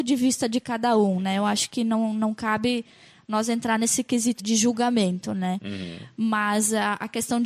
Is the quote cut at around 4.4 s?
yes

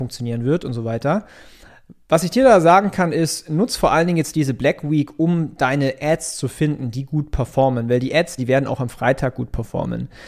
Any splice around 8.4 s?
yes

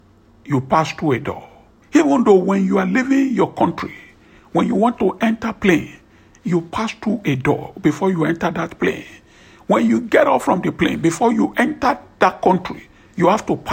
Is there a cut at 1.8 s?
yes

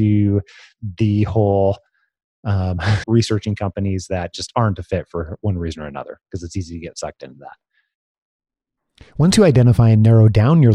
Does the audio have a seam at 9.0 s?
no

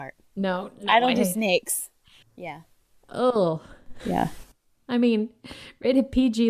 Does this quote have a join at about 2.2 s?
yes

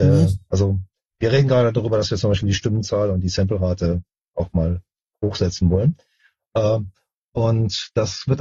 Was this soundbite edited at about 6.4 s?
no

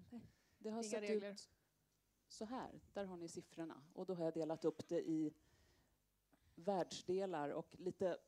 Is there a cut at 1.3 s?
no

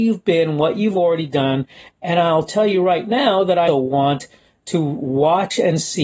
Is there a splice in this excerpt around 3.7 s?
yes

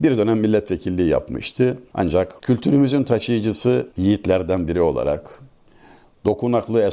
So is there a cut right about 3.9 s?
yes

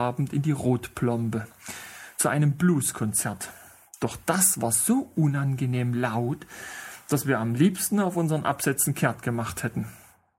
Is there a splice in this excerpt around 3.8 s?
no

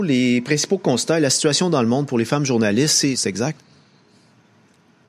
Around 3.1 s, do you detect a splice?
yes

